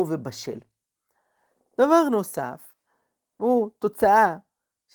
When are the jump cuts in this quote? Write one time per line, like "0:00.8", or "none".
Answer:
none